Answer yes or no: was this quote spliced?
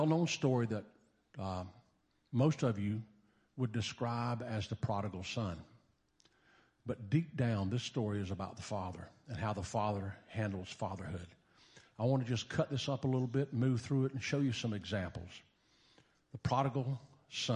no